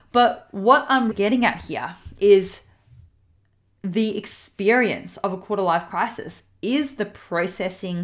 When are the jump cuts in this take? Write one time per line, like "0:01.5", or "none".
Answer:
0:01.1